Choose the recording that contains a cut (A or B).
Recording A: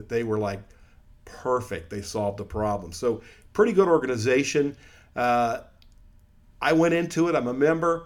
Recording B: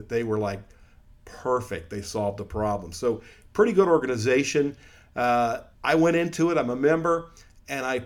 B